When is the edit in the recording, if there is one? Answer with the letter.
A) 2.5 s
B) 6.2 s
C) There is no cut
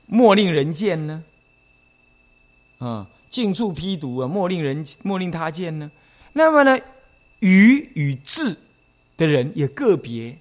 B